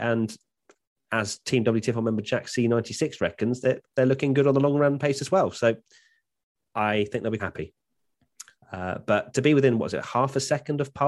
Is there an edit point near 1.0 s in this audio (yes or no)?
no